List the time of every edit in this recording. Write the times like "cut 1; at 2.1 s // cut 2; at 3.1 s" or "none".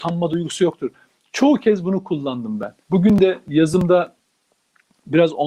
cut 1; at 2.8 s